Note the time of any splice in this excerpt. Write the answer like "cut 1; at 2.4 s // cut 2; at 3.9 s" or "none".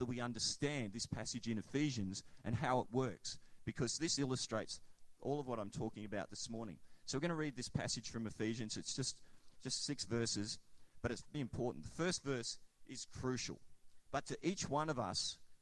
cut 1; at 11.3 s // cut 2; at 14.1 s